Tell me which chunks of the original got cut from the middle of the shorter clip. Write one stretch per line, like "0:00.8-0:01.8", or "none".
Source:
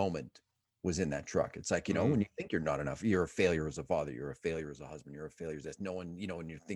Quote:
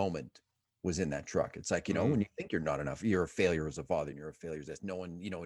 0:04.1-0:05.1